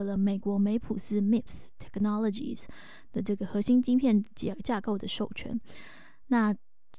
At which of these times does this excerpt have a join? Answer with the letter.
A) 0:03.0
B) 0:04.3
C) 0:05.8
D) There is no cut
D